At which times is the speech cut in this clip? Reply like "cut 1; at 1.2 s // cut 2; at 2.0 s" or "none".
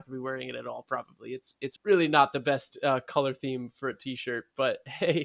cut 1; at 1.8 s